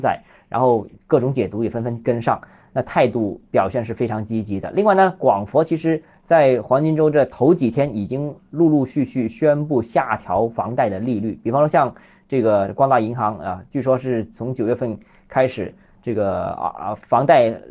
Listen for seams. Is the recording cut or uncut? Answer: uncut